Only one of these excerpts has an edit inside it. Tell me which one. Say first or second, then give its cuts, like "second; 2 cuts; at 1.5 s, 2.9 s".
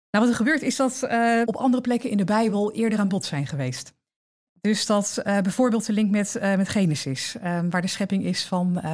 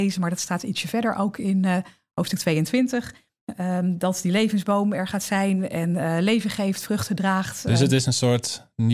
first; 1 cut; at 1.4 s